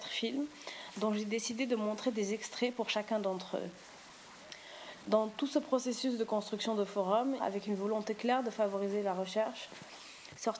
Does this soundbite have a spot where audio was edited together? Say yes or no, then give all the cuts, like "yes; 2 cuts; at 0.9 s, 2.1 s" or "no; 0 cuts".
yes; 2 cuts; at 5.0 s, 7.4 s